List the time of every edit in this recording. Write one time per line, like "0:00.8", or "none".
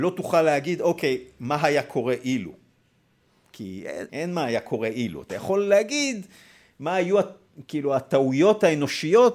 0:04.1